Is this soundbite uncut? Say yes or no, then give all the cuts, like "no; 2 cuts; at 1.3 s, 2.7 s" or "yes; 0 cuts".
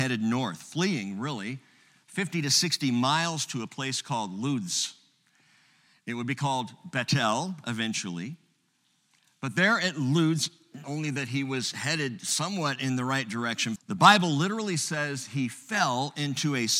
no; 2 cuts; at 10.8 s, 13.8 s